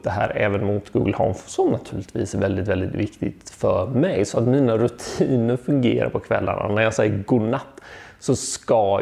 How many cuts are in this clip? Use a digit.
0